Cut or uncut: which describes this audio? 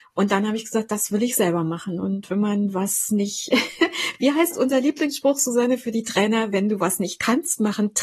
uncut